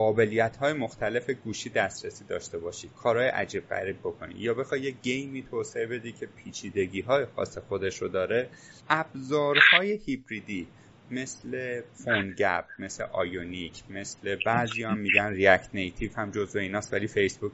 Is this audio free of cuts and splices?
no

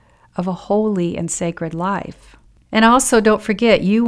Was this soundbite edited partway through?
yes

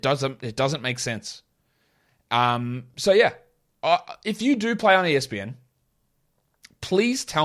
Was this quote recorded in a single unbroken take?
yes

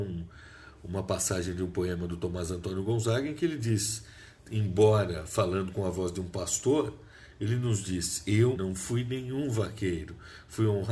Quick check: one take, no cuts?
no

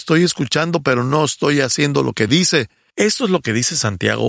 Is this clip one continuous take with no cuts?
no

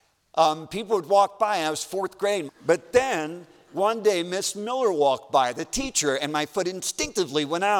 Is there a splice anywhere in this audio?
yes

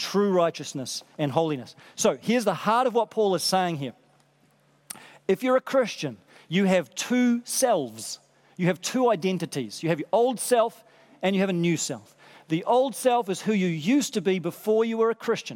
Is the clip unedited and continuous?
yes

